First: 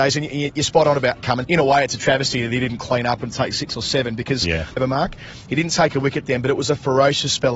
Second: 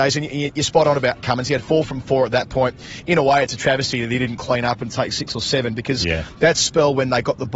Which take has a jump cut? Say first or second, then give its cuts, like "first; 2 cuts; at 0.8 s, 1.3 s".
first; 2 cuts; at 1.4 s, 4.8 s